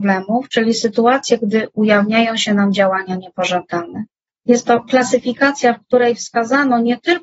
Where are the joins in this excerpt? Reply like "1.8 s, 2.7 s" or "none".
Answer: 4.3 s